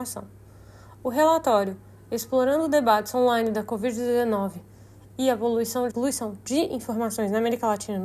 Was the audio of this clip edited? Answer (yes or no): yes